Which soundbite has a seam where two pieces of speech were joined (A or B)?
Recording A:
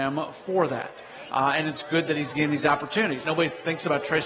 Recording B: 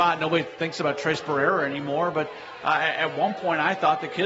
A